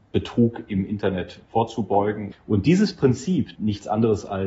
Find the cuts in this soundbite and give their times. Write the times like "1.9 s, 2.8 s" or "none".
2.3 s, 3.6 s